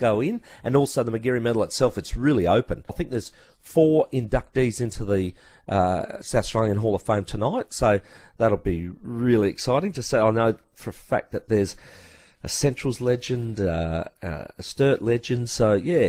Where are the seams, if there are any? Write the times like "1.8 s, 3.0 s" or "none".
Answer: 2.9 s